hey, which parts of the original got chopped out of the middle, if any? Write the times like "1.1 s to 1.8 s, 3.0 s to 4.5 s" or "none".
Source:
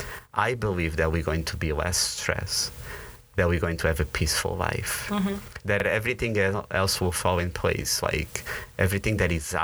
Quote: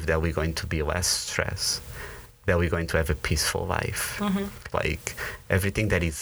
5.6 s to 8.0 s